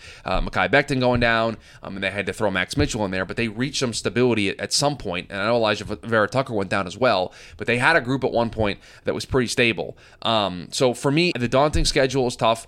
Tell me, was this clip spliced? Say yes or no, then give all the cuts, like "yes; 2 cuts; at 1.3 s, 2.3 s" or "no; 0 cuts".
yes; 1 cut; at 11.3 s